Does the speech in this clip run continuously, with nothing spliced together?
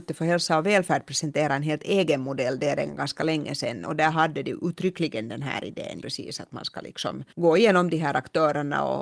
no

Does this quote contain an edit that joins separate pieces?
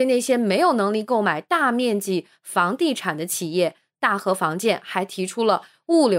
no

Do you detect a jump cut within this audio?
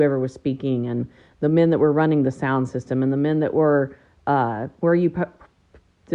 yes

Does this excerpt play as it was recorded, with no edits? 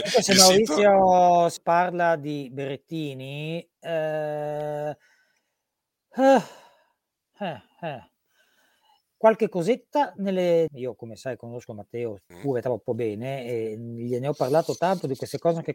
no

